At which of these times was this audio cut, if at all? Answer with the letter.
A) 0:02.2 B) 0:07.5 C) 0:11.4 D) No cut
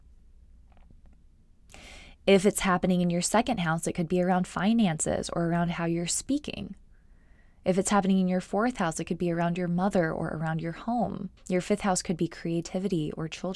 C